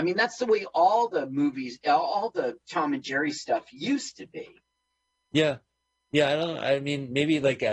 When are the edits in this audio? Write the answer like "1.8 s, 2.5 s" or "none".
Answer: none